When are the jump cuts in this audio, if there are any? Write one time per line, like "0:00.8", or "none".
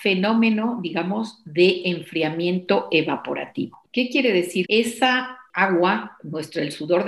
0:04.6